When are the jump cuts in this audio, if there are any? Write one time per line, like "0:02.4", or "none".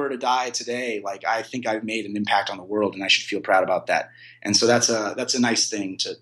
none